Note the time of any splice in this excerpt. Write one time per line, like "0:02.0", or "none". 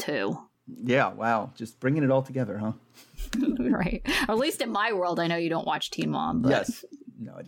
none